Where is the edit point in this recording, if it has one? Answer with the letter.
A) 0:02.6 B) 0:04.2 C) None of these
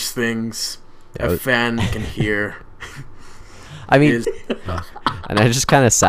B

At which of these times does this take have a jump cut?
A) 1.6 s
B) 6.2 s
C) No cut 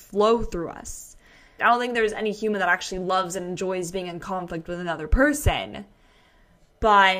A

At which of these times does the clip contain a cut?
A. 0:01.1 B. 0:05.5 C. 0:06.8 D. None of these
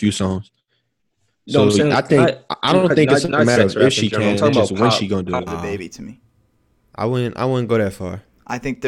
B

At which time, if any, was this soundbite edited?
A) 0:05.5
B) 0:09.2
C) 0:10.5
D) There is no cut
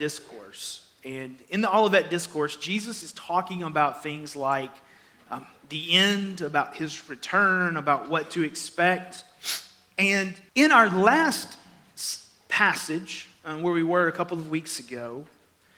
C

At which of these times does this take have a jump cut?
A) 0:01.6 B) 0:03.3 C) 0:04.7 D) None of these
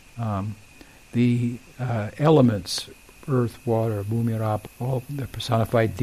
C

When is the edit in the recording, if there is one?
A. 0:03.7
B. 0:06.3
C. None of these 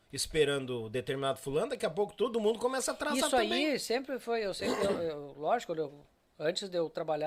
C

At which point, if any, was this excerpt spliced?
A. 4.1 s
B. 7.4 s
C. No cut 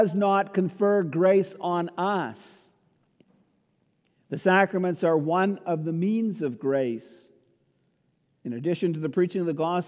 C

